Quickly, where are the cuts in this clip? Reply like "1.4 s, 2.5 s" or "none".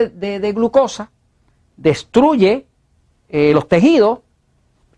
none